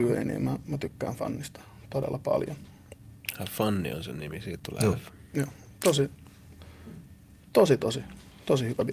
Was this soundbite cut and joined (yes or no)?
no